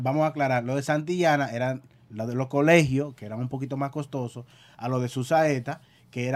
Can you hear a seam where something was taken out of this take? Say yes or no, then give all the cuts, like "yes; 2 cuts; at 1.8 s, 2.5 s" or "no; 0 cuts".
no; 0 cuts